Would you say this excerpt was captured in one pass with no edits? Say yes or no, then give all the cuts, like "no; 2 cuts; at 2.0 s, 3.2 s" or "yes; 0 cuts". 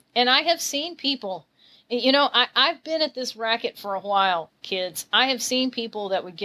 yes; 0 cuts